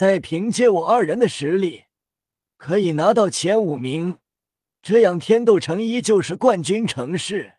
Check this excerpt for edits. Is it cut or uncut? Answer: uncut